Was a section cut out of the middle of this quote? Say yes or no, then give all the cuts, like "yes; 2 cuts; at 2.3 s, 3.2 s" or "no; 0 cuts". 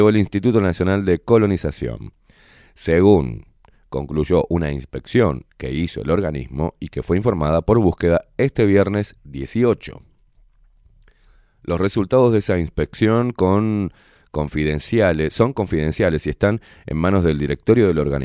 no; 0 cuts